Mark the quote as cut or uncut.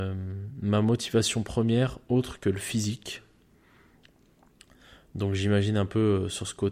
uncut